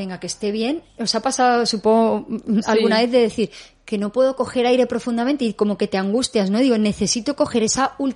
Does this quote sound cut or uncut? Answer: cut